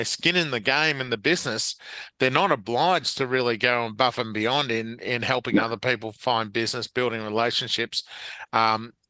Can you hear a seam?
no; 0 cuts

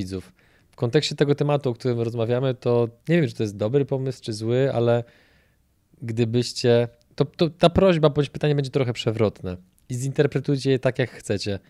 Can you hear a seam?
yes; 1 cut; at 3.0 s

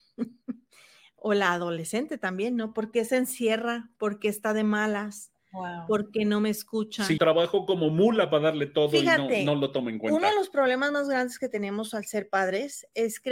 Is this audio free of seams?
no; 1 cut; at 7.2 s

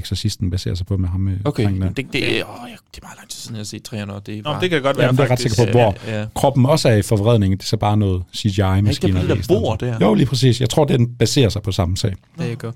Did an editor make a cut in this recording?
no; 0 cuts

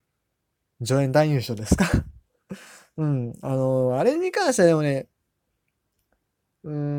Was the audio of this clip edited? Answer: no; 0 cuts

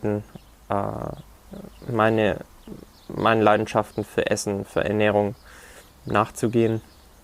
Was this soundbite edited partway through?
yes; 2 cuts; at 4.1 s, 5.9 s

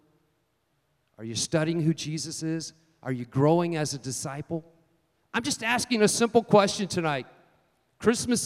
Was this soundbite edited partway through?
no; 0 cuts

